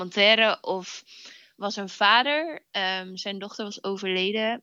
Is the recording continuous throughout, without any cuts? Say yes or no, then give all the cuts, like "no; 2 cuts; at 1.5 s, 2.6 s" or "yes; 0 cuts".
yes; 0 cuts